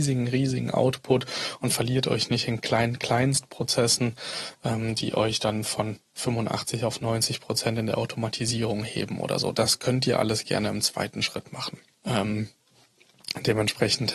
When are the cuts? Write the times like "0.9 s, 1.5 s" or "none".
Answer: 12.0 s